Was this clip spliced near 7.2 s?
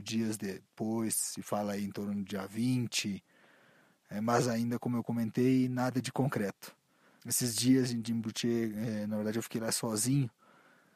yes; 1 cut; at 7.2 s

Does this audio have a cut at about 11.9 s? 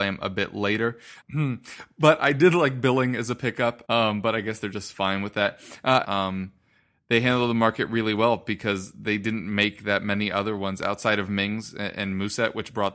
no; 3 cuts; at 1.2 s, 3.8 s, 6.0 s

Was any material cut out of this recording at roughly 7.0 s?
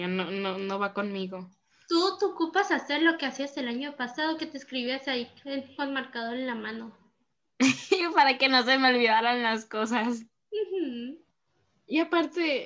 no; 0 cuts

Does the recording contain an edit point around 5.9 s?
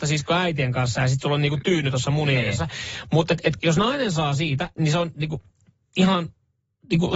no; 1 cut; at 3.6 s

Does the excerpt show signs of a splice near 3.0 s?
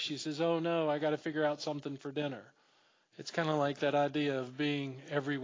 yes; 1 cut; at 3.0 s

